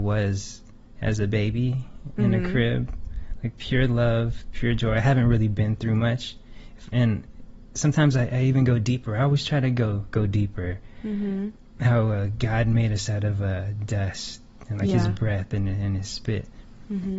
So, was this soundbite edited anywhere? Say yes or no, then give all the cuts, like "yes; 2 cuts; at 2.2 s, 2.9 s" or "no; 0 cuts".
no; 0 cuts